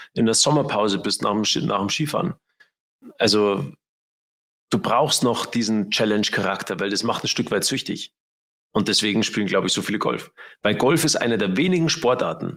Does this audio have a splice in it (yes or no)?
no